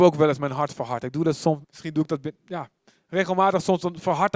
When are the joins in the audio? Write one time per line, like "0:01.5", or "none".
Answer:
0:01.6